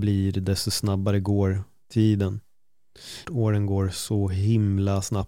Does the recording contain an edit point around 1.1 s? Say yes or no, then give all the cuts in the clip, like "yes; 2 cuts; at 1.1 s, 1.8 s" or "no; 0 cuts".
no; 1 cut; at 3.2 s